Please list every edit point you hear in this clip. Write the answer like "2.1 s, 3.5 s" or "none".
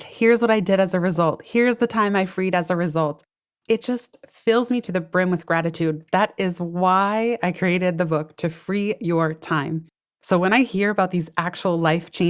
none